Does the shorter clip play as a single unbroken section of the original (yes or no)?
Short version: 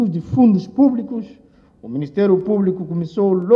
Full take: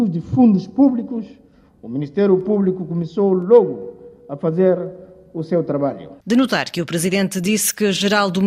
yes